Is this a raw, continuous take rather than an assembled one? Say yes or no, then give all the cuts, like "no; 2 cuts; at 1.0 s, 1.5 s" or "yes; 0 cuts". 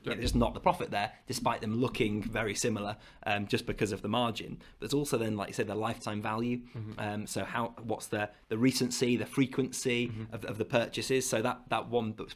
yes; 0 cuts